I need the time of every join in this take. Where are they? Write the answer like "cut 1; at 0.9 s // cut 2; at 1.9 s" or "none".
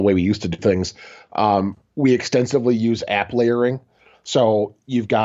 none